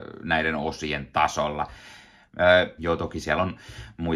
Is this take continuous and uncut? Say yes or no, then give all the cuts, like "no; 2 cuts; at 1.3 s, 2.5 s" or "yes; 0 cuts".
no; 1 cut; at 2.8 s